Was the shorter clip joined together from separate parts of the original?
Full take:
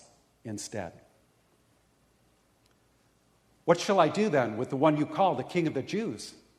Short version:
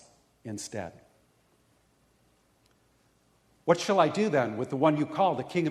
no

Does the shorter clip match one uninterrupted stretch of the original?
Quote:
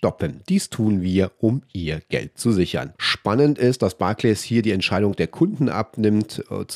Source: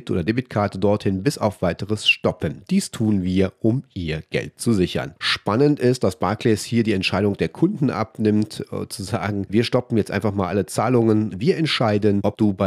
yes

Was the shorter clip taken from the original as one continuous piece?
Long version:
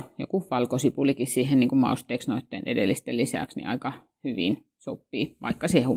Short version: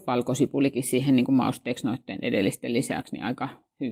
yes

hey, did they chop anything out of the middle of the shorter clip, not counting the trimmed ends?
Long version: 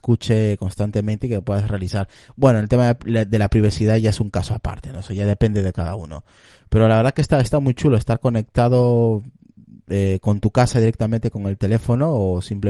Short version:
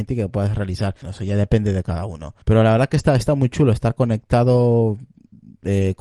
yes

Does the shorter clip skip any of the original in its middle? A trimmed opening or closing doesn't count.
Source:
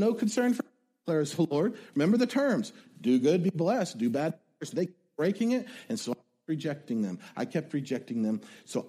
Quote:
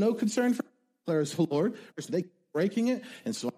yes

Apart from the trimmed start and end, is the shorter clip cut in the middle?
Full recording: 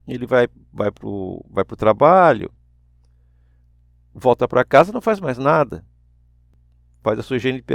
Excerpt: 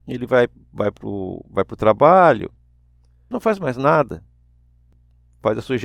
yes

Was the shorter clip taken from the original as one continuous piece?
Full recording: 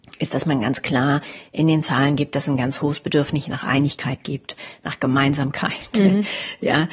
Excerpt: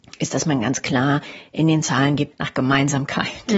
no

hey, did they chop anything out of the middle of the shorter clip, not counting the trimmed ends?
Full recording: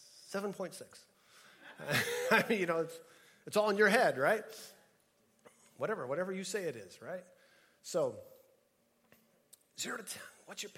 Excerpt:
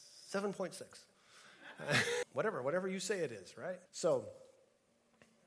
yes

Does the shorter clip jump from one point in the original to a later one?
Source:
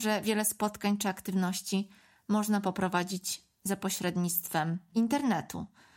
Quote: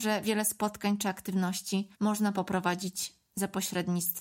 yes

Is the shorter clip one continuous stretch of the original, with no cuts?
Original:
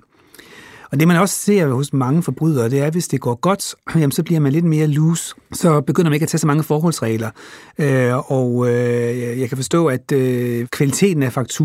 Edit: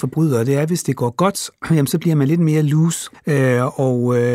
no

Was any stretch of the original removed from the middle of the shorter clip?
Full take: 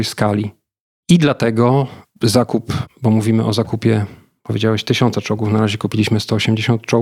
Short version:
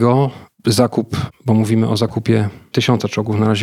yes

